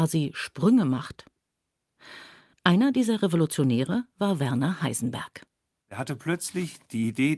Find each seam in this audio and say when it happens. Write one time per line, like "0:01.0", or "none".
0:02.5